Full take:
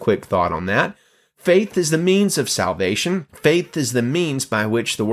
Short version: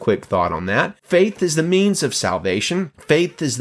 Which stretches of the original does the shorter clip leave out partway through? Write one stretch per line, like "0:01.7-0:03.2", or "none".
0:01.0-0:01.3